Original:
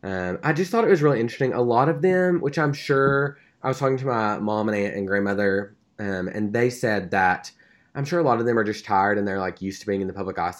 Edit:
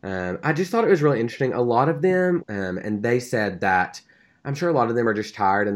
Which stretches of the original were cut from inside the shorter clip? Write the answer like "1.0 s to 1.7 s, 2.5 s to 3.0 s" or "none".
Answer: 2.4 s to 5.9 s